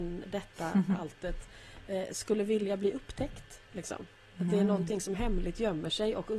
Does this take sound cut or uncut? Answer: uncut